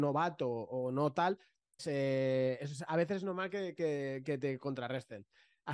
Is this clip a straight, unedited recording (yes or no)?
no